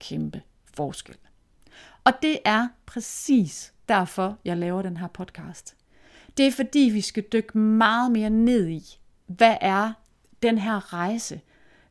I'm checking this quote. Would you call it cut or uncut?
uncut